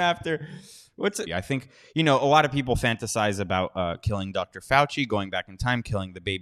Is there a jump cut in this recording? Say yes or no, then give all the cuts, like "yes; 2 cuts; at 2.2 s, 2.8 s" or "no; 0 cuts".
yes; 1 cut; at 1.3 s